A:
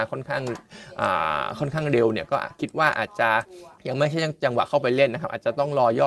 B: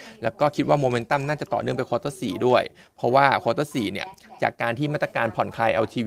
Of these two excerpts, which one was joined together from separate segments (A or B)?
A